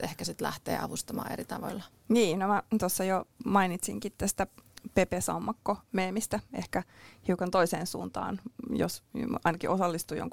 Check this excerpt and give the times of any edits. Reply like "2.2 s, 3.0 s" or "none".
1.9 s